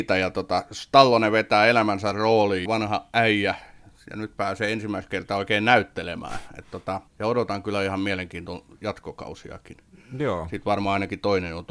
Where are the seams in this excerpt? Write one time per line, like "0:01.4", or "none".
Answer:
0:02.7
0:07.1